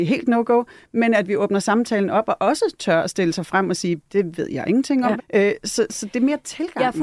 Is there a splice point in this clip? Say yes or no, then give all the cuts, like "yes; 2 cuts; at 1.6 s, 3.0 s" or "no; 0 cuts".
yes; 1 cut; at 5.2 s